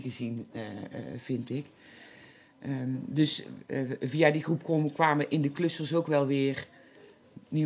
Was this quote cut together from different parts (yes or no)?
no